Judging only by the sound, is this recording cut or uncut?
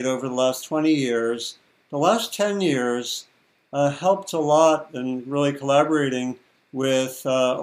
uncut